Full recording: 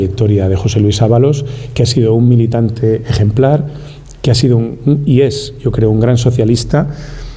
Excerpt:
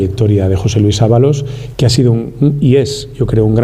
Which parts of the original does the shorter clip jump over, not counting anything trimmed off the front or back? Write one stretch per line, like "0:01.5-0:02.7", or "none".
0:01.7-0:04.2